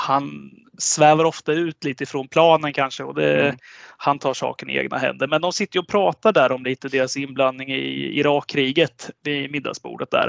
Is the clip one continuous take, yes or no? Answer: no